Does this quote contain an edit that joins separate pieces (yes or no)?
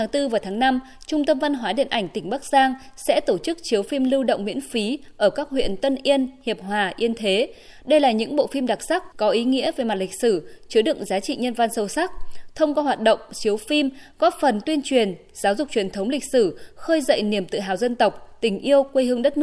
yes